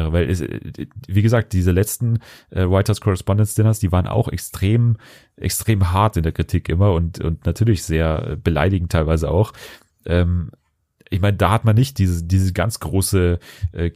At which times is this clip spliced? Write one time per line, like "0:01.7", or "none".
none